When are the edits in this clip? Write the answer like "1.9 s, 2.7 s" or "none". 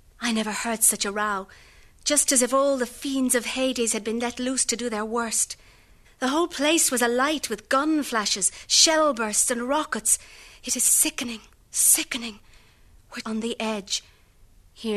6.0 s, 13.2 s

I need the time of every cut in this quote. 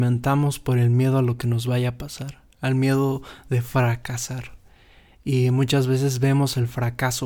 none

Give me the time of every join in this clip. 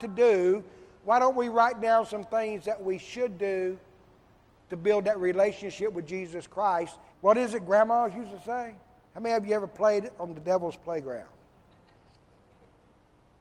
7.1 s, 9.1 s

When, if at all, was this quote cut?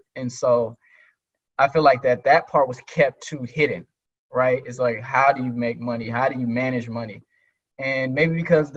none

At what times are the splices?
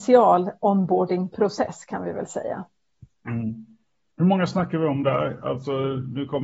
none

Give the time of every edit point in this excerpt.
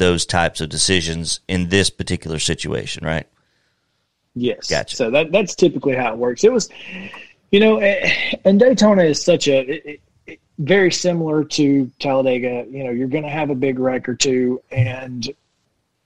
none

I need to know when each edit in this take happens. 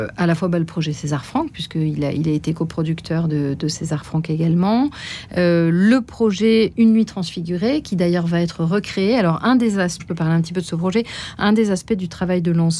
10.0 s

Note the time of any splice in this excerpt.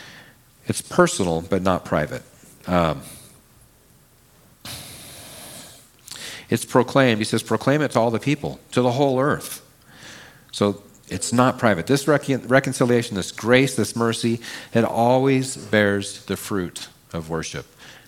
none

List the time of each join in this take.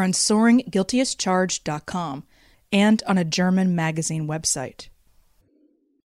2.5 s

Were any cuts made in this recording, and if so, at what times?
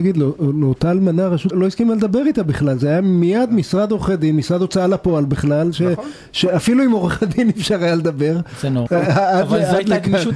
1.5 s, 8.9 s

